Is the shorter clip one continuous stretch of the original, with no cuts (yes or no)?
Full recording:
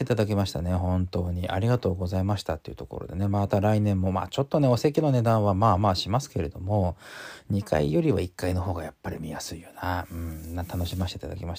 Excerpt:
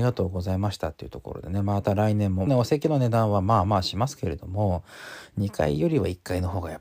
no